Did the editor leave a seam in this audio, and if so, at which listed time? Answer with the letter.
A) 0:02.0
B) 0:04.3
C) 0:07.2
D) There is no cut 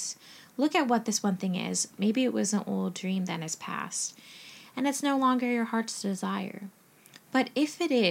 A